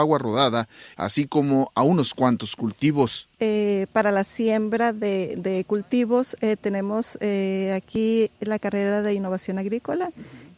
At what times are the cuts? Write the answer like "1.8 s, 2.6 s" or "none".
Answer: 0.9 s, 3.4 s